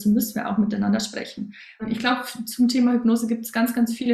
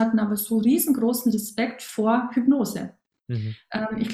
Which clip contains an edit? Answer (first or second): first